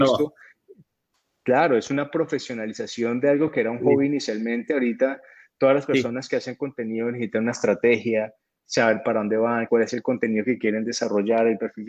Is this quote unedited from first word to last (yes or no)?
no